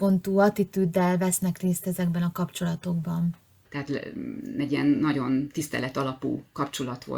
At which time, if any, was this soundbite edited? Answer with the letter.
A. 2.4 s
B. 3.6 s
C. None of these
B